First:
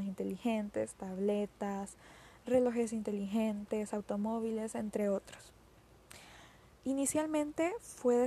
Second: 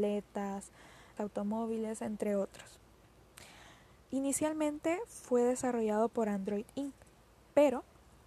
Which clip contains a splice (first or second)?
second